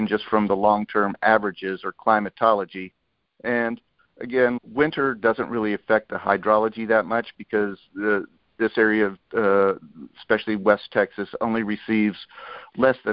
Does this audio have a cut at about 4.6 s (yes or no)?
yes